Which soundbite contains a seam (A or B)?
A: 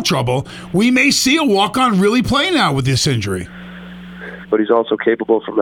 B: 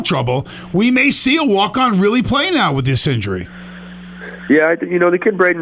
A